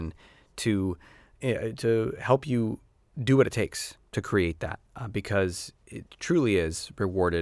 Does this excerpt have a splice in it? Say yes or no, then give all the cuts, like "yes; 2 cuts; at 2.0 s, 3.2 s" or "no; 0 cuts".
yes; 1 cut; at 4.9 s